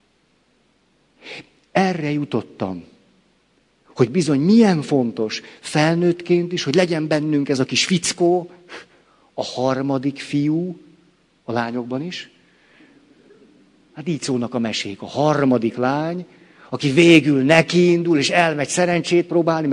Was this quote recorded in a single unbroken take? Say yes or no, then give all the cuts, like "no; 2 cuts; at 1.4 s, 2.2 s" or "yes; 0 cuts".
yes; 0 cuts